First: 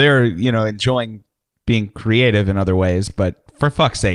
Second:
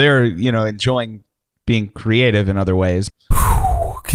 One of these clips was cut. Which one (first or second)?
second